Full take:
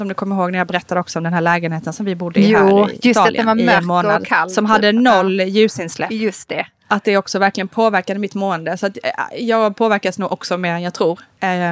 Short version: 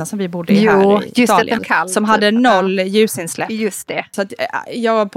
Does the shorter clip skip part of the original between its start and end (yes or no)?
yes